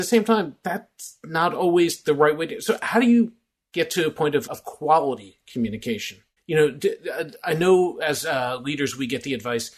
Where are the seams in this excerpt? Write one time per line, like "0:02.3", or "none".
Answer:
0:04.5
0:06.4